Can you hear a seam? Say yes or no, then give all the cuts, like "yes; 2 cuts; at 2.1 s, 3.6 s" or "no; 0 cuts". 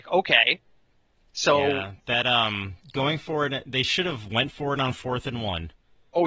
no; 0 cuts